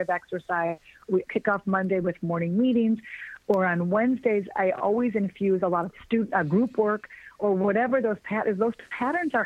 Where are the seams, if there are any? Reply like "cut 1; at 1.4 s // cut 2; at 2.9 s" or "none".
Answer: cut 1; at 1.3 s